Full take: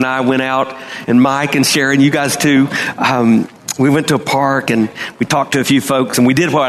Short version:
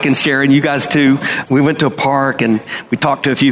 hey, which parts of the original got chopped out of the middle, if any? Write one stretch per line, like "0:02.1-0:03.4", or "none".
0:02.9-0:03.7